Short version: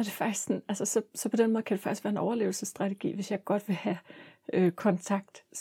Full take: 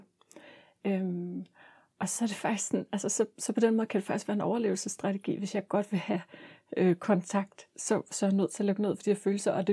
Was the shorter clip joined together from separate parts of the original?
no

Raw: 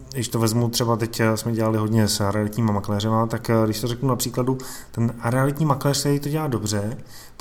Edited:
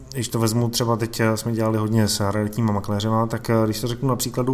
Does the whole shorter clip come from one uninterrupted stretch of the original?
yes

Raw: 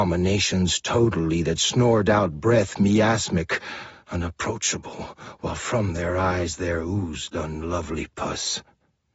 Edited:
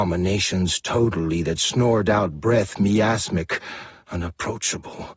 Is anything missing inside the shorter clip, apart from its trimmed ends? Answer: no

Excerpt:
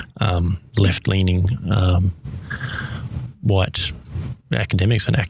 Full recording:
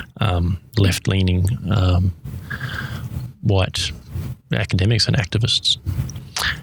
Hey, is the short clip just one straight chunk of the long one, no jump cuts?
yes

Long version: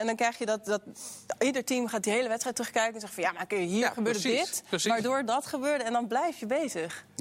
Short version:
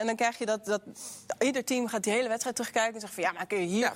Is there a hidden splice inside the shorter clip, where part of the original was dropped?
no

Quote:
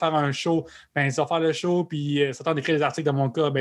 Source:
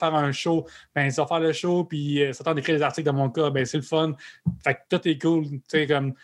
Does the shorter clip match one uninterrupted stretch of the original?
yes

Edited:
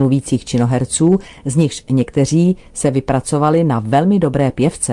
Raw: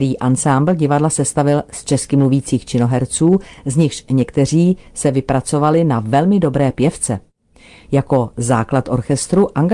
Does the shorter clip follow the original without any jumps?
yes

